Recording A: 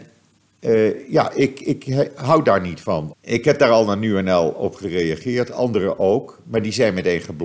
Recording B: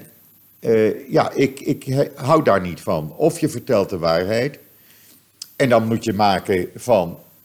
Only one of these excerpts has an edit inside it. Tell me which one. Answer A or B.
A